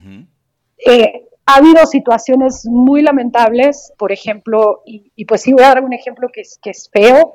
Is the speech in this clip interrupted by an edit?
yes; 1 cut; at 3.9 s

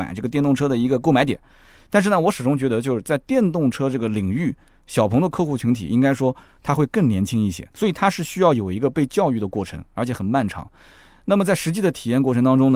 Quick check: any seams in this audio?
yes; 1 cut; at 7.7 s

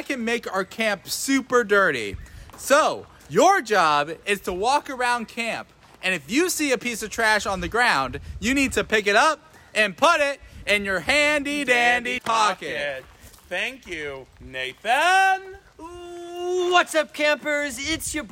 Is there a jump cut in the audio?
yes; 1 cut; at 12.2 s

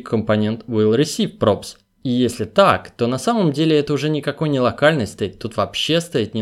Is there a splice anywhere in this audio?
no; 0 cuts

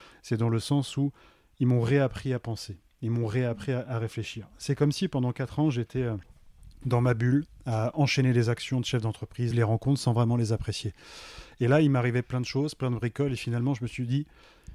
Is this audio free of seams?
no; 1 cut; at 9.5 s

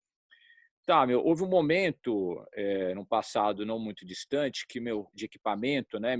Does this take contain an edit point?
yes; 1 cut; at 5.1 s

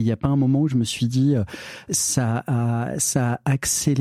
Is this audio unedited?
no; 1 cut; at 1.9 s

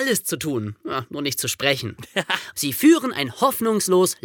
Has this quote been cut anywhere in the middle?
yes; 1 cut; at 2.5 s

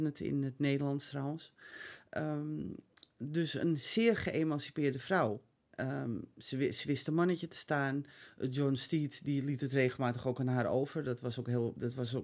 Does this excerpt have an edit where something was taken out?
no; 0 cuts

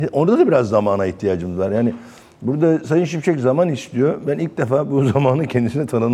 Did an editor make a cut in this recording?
no; 0 cuts

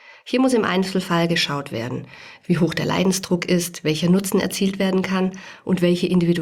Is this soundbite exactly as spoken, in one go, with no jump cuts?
yes; 0 cuts

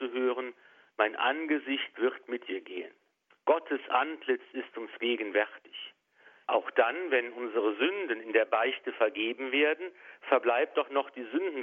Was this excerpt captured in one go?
no; 2 cuts; at 3.3 s, 6.4 s

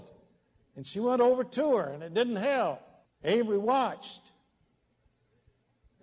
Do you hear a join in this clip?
yes; 1 cut; at 3.1 s

